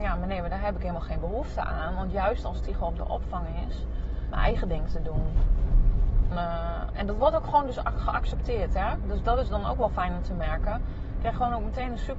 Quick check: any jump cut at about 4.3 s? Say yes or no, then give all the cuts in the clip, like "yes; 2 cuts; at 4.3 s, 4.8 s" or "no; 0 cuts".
yes; 2 cuts; at 4.3 s, 6.3 s